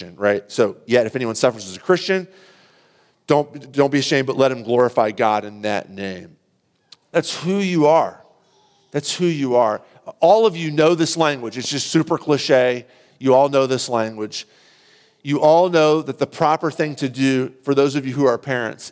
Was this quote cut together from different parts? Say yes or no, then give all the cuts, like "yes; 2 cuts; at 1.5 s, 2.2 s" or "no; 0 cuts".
no; 0 cuts